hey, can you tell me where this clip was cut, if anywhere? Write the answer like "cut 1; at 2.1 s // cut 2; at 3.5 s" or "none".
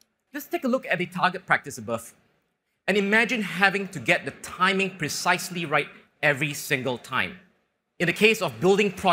cut 1; at 7.8 s